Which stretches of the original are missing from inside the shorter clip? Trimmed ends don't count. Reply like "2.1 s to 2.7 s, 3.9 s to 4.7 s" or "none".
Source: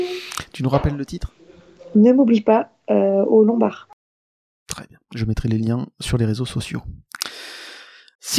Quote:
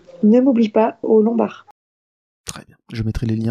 2.8 s to 3.3 s